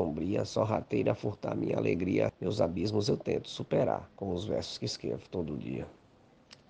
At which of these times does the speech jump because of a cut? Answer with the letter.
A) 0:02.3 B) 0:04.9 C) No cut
A